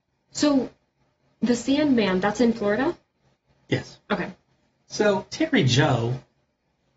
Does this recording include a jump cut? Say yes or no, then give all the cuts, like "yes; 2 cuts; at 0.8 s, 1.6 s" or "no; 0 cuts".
no; 0 cuts